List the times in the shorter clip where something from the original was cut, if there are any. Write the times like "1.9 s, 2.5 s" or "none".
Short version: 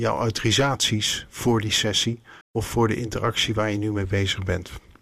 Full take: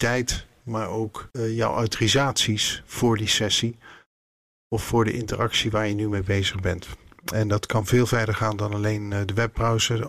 2.4 s